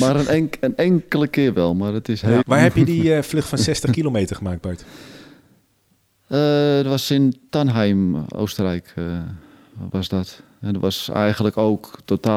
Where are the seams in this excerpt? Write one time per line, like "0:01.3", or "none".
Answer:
0:02.4